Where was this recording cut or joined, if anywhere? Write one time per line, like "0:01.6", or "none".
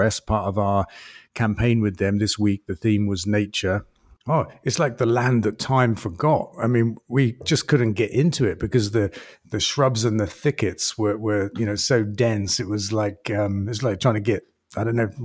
0:04.2

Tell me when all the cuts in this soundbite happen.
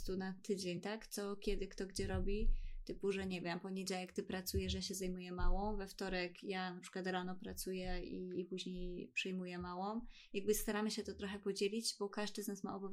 none

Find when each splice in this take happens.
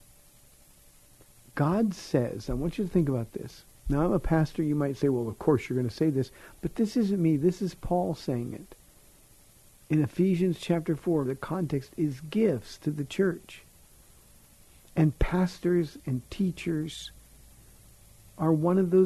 0:11.3

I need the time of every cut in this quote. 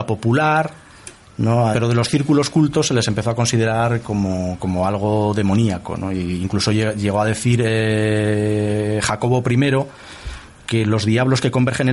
0:01.7

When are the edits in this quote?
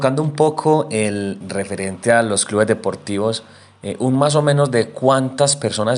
0:01.4

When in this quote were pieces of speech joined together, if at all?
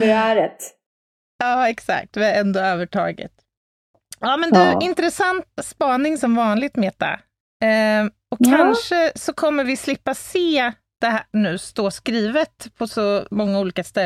0:05.5

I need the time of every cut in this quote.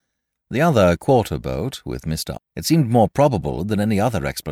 0:02.3

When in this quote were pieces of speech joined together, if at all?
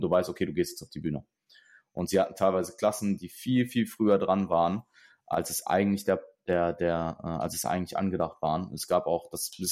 none

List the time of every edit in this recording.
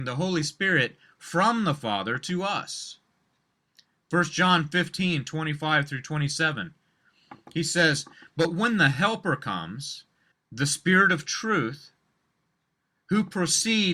0:10.3

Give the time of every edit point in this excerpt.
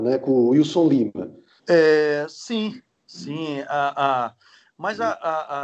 0:01.6

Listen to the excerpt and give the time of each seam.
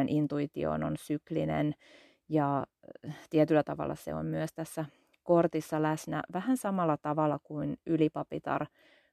none

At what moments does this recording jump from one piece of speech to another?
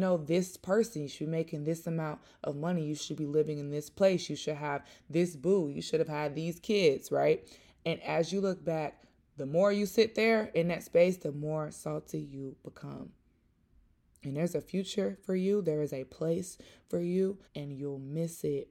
0:17.5

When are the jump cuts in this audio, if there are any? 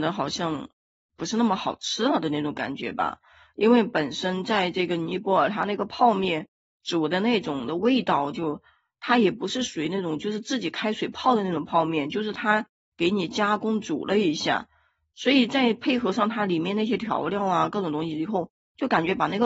none

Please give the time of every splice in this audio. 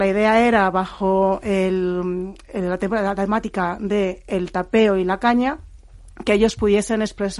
none

